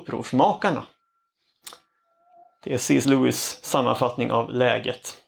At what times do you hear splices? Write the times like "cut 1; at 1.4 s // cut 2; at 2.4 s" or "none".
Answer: none